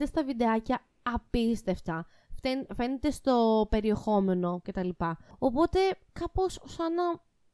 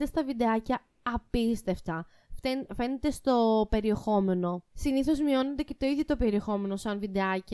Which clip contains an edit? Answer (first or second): first